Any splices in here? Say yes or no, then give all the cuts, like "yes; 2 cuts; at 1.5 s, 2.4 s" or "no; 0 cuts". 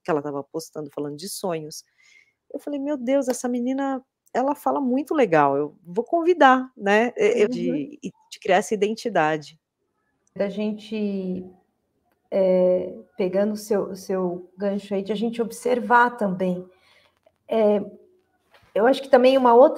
yes; 2 cuts; at 7.5 s, 10.4 s